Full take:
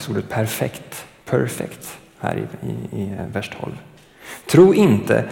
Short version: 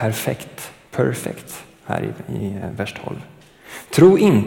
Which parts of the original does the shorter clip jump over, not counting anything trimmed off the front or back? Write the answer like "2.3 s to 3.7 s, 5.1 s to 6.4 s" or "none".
2.7 s to 3.0 s